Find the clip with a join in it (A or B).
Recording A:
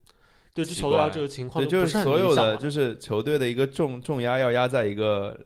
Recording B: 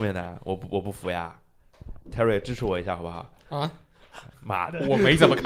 B